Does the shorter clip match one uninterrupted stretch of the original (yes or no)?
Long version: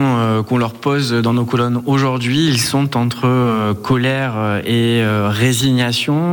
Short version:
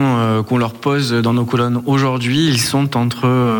yes